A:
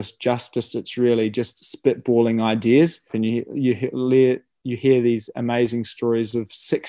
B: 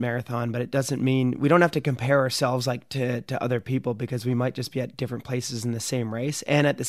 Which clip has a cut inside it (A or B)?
A